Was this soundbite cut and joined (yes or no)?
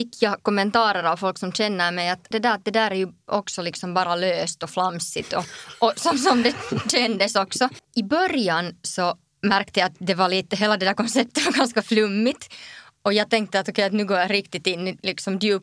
yes